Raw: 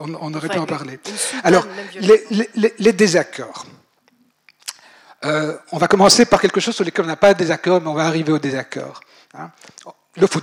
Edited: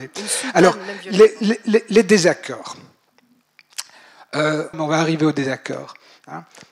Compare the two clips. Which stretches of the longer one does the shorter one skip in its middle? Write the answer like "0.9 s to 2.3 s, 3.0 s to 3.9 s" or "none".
5.6 s to 7.8 s